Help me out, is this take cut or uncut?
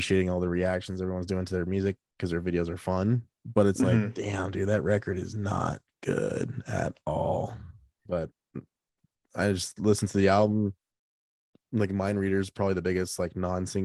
cut